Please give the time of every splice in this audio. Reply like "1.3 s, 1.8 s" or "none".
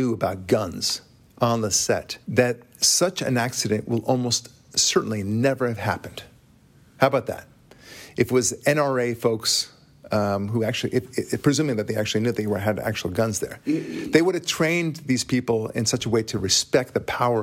2.2 s